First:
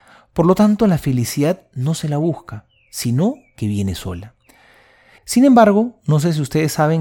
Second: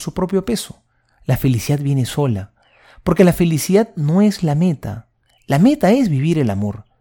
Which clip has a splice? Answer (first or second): first